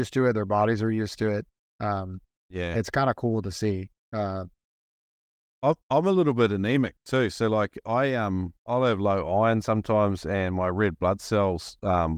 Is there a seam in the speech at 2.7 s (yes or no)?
no